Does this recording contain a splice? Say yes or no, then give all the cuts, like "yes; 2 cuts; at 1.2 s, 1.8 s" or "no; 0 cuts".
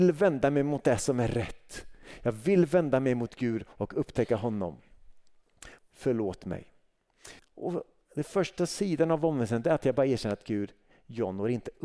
yes; 2 cuts; at 5.8 s, 7.4 s